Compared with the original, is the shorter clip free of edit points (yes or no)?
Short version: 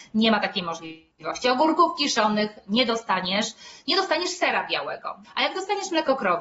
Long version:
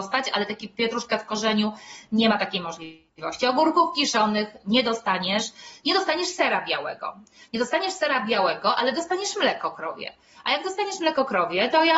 no